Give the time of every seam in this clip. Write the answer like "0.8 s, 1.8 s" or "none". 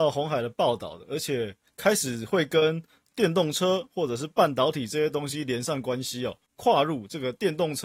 6.5 s